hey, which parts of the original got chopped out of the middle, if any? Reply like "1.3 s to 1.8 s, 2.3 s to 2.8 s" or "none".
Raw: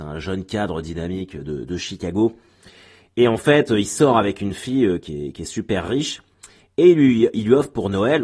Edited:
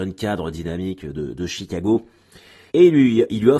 3.0 s to 6.7 s